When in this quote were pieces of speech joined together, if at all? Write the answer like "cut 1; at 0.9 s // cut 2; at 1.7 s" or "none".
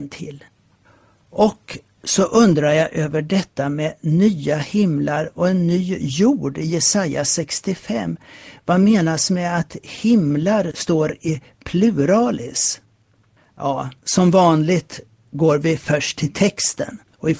none